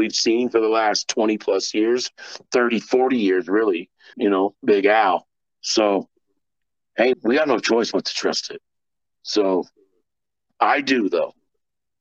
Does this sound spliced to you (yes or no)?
yes